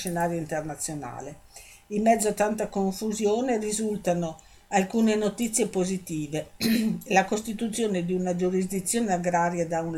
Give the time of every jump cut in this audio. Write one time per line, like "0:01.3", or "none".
none